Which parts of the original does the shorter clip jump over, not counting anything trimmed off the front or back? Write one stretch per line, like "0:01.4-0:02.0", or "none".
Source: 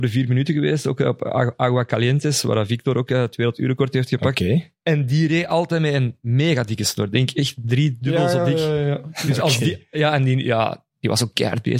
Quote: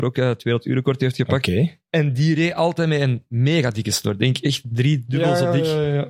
none